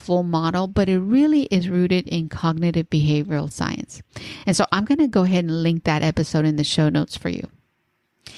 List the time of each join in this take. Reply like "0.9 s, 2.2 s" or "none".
none